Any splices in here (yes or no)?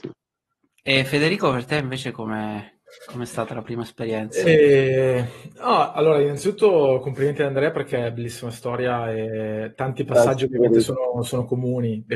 no